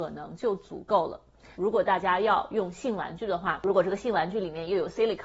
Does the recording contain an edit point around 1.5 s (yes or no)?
yes